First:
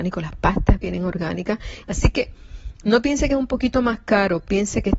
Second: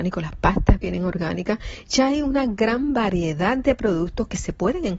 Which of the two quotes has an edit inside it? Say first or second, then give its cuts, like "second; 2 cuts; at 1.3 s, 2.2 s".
first; 1 cut; at 1.8 s